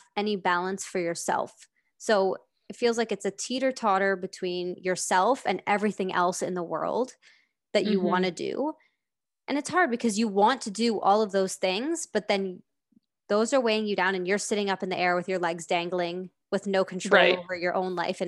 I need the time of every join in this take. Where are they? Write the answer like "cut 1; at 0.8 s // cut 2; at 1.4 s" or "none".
none